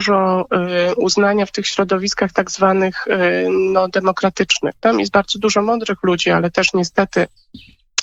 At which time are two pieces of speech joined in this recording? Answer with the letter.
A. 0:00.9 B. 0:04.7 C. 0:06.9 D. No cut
D